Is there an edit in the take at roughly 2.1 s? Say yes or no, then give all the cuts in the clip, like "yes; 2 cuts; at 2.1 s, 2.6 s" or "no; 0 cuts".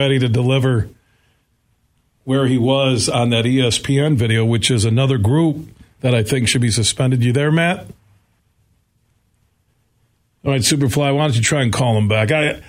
no; 0 cuts